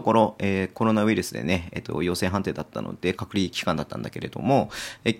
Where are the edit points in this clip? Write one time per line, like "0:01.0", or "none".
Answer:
0:03.2

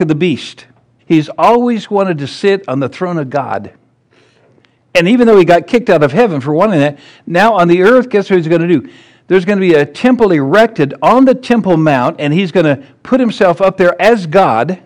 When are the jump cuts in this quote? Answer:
0:01.0

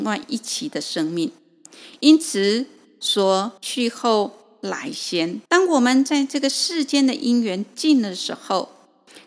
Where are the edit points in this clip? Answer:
0:03.6
0:05.5

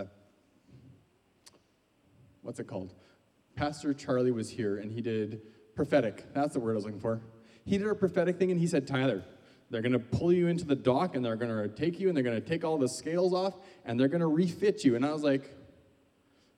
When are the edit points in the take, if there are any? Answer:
none

